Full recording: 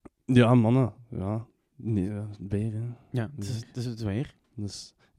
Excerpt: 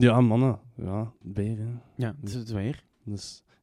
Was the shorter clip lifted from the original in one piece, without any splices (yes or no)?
no